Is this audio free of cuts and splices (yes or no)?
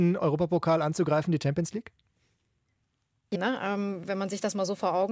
no